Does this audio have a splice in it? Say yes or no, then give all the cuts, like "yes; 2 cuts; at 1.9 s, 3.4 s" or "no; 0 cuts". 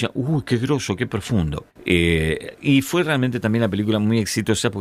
yes; 1 cut; at 1.7 s